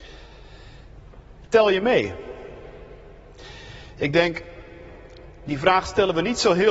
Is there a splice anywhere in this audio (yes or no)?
yes